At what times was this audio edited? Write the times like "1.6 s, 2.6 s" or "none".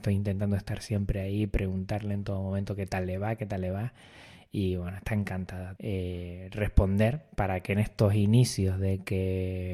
5.8 s